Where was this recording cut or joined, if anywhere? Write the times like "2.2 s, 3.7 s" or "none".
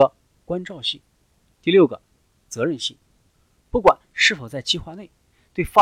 1.6 s